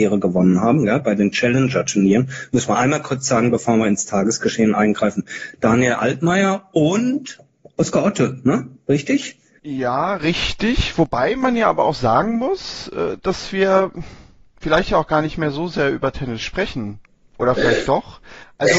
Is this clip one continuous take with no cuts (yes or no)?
no